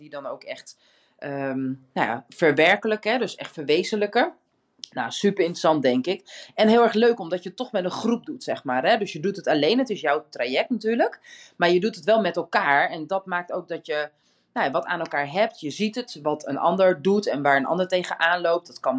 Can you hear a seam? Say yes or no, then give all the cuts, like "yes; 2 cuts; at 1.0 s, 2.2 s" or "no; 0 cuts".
no; 0 cuts